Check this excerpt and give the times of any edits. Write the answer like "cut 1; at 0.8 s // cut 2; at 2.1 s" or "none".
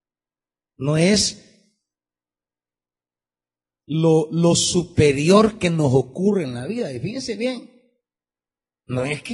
none